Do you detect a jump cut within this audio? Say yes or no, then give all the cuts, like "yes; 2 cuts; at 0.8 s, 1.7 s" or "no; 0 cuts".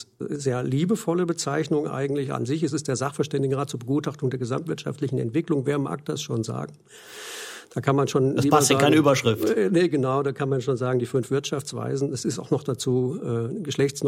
no; 0 cuts